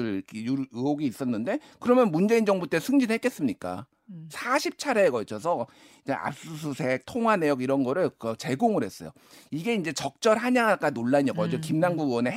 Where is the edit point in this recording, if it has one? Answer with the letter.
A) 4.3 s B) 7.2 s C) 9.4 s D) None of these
A